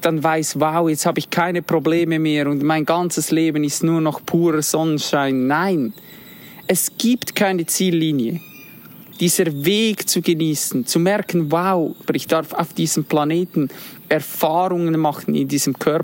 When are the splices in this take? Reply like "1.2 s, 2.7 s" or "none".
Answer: 9.1 s, 12.1 s